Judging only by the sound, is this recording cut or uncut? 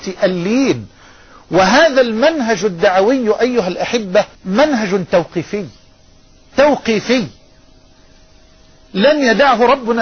cut